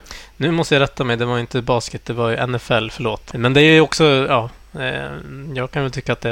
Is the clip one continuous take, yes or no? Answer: no